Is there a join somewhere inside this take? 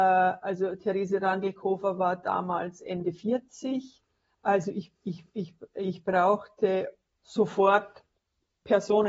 no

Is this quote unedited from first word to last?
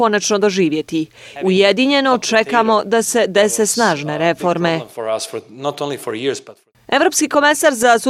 no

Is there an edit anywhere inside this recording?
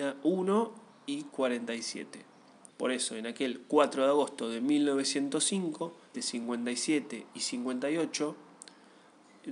yes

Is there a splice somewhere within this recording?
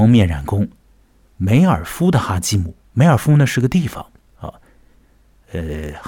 no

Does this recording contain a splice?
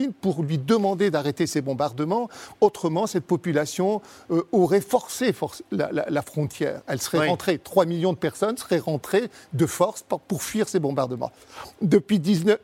no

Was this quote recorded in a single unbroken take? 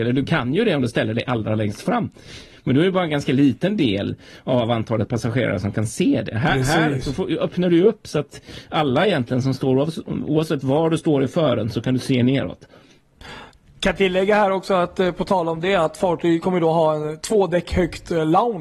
yes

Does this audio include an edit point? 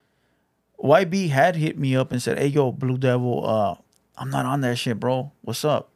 no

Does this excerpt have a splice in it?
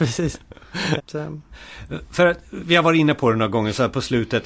yes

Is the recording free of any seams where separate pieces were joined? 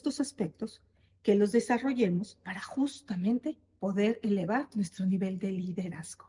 yes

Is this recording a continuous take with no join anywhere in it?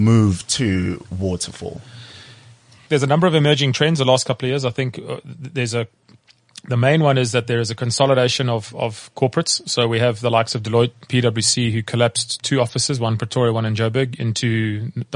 yes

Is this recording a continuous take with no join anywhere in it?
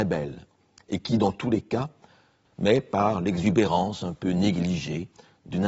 no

